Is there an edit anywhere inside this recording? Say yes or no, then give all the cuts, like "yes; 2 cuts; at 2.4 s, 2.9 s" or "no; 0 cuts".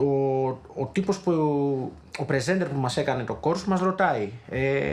no; 0 cuts